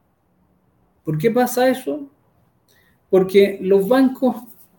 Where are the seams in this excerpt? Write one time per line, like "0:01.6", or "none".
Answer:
none